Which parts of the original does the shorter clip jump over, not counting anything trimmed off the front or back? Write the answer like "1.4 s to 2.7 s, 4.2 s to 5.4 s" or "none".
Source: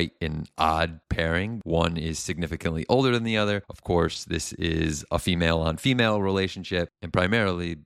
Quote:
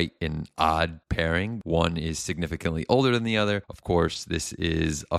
none